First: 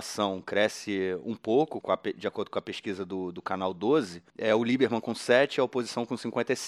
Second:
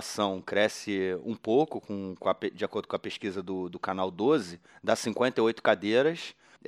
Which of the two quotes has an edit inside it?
first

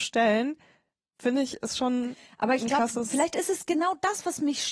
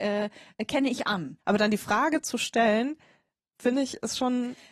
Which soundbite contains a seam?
second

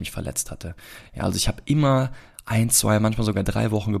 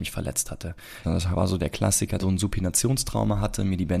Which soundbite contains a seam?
second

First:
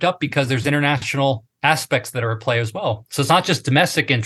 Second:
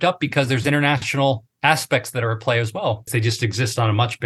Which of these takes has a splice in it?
second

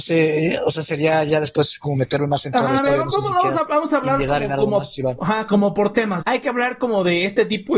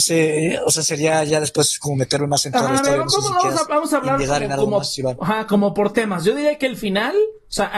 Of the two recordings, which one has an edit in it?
first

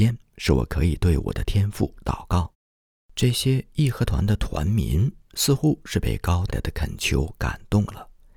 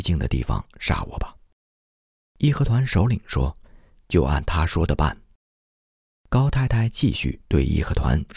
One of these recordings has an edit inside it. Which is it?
first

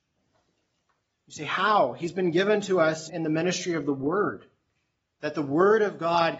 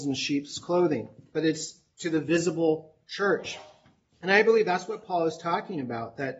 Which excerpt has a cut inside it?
first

